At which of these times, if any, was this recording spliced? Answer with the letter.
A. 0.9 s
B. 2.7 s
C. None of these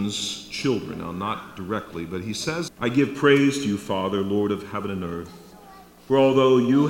B